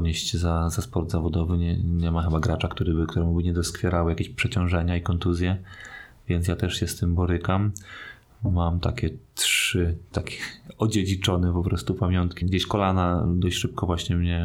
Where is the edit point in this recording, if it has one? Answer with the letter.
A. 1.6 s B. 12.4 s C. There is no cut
B